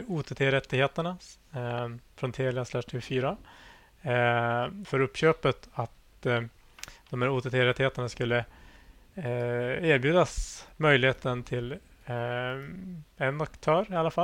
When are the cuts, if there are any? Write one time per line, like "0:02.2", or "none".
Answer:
0:04.8